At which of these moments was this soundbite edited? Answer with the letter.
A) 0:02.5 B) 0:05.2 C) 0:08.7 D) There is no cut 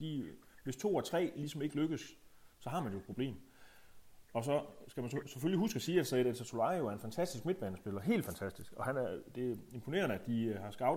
A